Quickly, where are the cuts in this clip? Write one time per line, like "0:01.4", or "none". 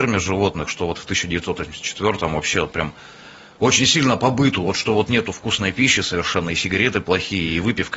none